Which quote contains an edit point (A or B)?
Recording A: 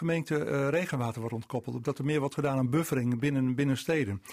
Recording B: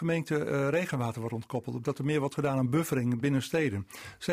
B